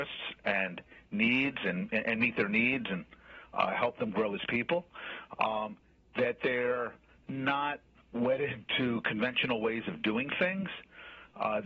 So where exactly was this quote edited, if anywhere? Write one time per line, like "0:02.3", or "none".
none